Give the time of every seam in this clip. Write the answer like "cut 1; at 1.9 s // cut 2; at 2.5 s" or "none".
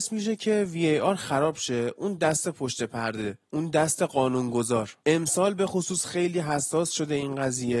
cut 1; at 3.4 s